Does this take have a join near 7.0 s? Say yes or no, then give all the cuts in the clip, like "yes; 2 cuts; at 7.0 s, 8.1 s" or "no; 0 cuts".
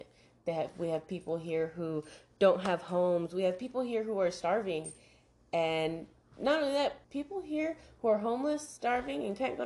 yes; 1 cut; at 7.0 s